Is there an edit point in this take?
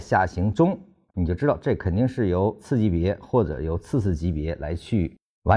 no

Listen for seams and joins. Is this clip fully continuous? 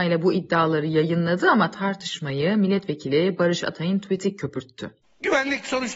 no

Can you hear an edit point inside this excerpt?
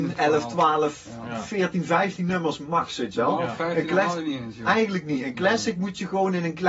no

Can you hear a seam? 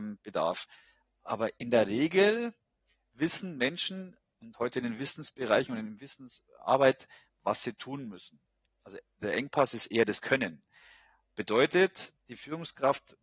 yes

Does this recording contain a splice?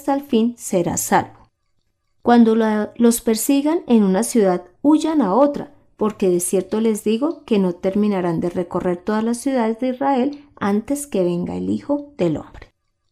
no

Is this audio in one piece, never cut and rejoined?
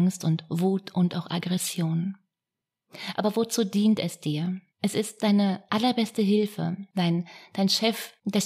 no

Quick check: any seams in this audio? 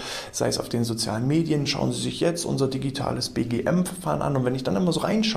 no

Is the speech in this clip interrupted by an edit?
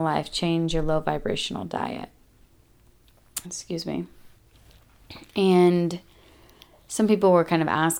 yes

